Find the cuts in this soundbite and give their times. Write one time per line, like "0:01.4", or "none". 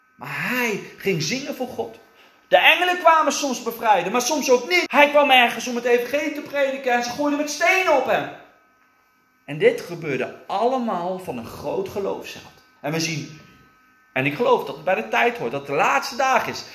0:04.9
0:12.8